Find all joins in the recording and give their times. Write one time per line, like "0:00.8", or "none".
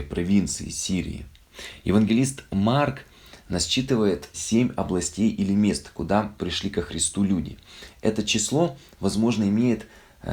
0:04.3